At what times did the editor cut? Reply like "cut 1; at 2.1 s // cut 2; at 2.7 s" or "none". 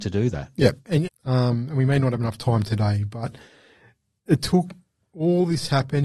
cut 1; at 1.1 s

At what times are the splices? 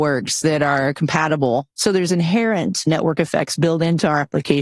cut 1; at 1.7 s

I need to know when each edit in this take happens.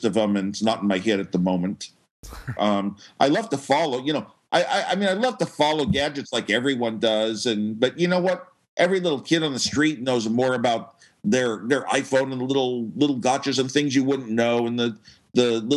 cut 1; at 2.6 s

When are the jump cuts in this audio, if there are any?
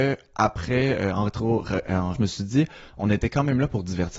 cut 1; at 2.1 s

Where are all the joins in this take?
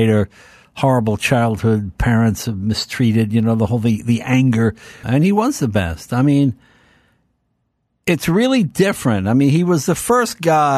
cut 1; at 5.0 s

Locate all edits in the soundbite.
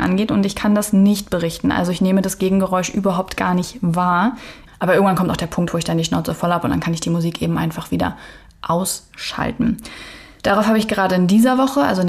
cut 1; at 4.7 s // cut 2; at 10.4 s

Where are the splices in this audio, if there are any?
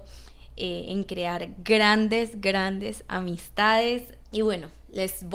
cut 1; at 4.2 s

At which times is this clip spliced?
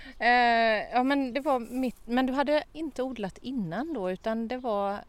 none

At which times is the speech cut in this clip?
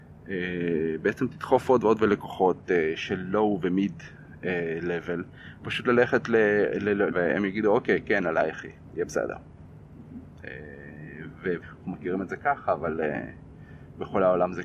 cut 1; at 7.1 s // cut 2; at 11.6 s

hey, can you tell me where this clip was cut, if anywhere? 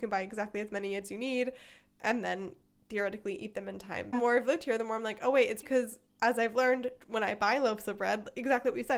cut 1; at 4.1 s // cut 2; at 5.6 s

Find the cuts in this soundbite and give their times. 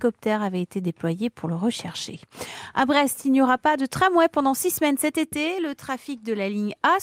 none

